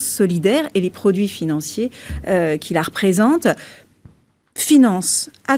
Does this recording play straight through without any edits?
yes; 0 cuts

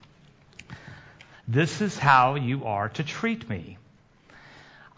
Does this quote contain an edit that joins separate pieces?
yes; 1 cut; at 1.3 s

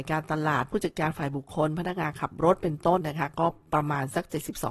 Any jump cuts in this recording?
yes; 1 cut; at 3.0 s

